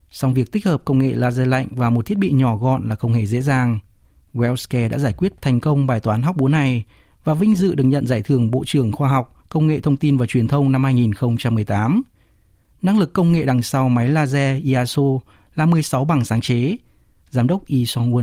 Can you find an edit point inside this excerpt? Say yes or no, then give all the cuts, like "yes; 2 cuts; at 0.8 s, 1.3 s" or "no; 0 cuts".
no; 0 cuts